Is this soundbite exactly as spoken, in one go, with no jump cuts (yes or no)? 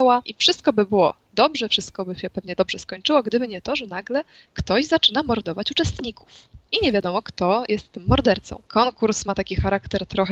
no